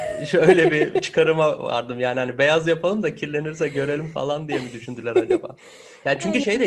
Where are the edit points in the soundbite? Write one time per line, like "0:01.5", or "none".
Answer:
none